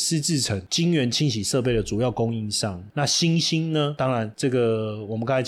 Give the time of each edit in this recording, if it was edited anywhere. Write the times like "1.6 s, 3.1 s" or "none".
2.9 s